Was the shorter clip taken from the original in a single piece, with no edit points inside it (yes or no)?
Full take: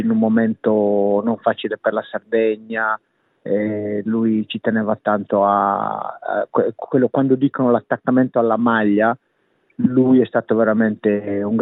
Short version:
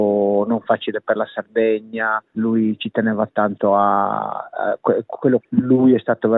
no